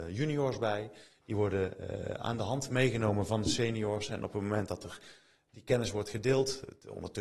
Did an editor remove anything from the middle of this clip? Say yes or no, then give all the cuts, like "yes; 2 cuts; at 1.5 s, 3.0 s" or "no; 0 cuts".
no; 0 cuts